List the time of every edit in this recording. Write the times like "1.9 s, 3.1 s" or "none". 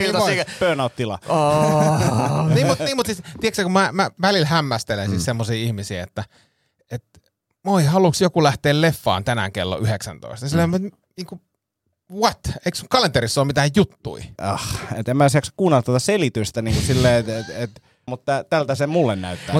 14.4 s, 18.1 s